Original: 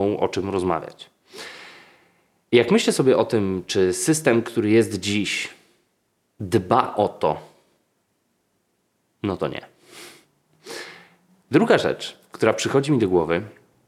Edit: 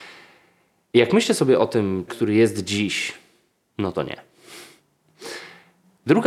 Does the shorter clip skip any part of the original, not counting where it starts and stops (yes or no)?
yes